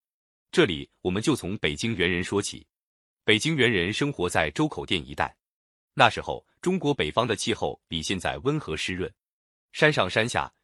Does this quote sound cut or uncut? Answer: uncut